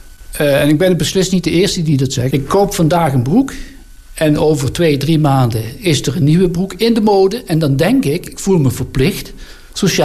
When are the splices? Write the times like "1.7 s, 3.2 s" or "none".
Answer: 2.3 s